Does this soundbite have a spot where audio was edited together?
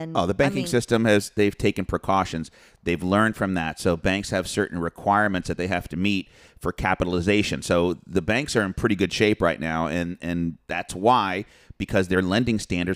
no; 0 cuts

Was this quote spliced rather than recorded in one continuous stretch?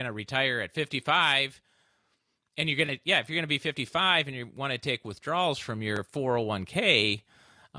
no; 0 cuts

